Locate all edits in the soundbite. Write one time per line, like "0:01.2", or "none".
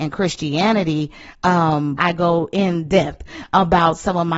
0:02.0